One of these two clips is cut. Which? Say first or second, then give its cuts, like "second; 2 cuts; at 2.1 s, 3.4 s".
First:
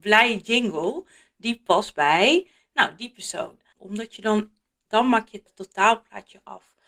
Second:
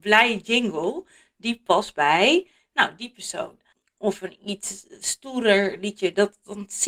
first; 1 cut; at 3.8 s